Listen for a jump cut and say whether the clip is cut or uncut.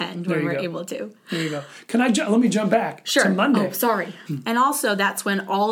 cut